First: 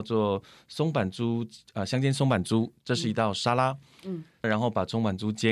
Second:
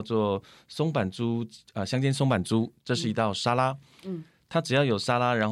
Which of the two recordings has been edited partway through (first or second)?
first